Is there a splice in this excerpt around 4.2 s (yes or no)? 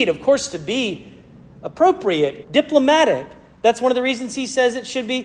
no